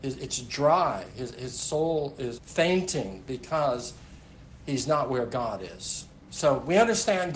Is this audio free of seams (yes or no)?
no